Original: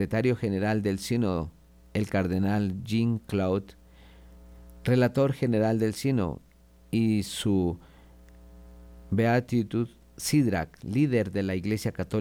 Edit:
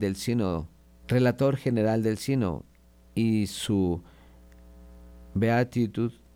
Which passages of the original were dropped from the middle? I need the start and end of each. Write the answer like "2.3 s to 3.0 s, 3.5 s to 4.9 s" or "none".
1.9 s to 4.8 s